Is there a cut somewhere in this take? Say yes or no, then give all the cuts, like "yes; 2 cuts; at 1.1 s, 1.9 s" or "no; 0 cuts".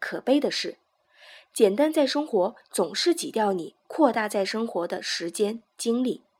no; 0 cuts